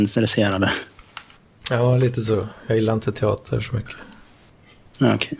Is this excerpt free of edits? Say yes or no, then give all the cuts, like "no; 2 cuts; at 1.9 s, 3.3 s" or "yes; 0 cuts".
yes; 0 cuts